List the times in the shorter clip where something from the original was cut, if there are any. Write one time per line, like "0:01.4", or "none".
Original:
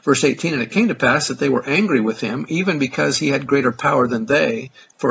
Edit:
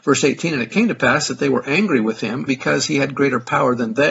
0:02.5

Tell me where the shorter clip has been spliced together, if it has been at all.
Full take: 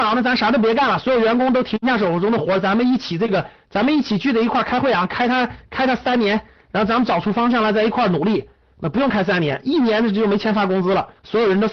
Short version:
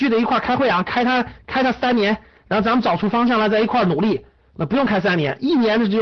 none

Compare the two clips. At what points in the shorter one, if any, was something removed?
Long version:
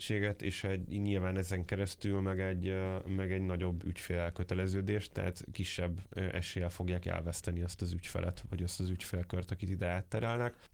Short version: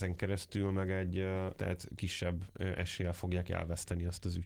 0:01.5

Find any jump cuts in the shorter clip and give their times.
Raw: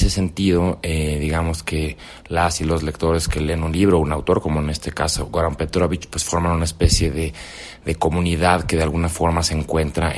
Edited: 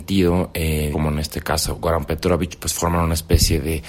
0:00.9

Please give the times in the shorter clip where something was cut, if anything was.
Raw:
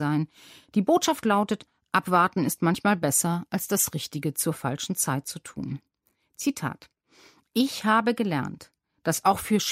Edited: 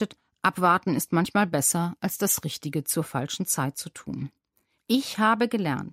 0:04.8

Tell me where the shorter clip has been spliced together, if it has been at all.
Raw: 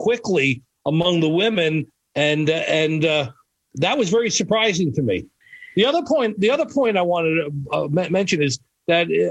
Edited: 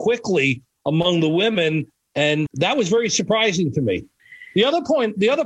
0:02.5

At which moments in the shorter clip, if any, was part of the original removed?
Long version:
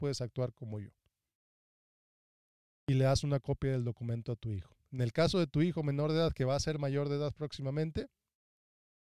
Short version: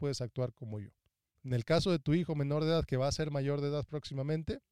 0:01.3

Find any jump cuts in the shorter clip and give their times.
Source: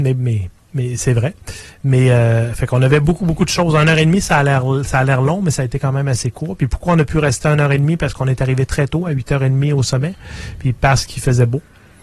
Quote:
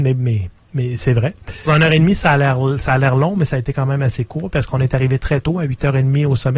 0:01.7
0:04.5

